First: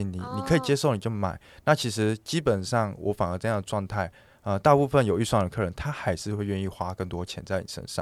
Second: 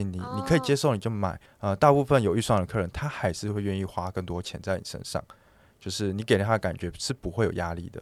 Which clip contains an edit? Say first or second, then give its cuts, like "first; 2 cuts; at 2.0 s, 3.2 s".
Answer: second; 1 cut; at 1.5 s